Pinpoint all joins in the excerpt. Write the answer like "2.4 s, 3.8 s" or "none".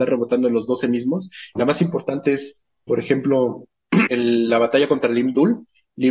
1.6 s, 4.1 s